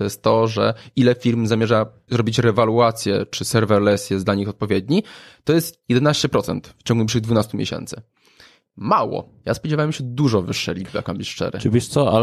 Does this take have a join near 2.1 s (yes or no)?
yes